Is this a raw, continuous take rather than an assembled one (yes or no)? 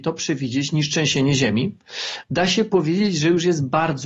no